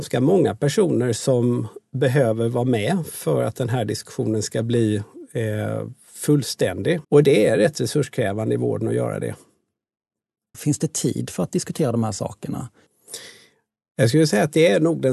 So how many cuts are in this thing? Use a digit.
2